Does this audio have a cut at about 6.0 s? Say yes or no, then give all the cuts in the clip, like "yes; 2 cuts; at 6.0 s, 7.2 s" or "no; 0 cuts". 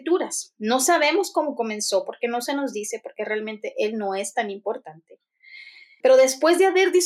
yes; 1 cut; at 6.0 s